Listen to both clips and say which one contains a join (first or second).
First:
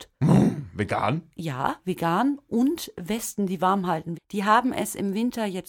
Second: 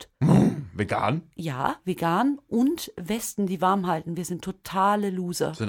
first